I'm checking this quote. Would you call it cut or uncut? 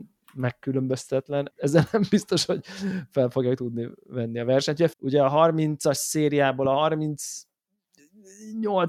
cut